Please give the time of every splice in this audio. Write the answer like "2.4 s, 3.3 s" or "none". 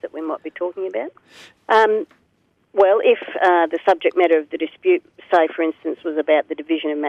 1.6 s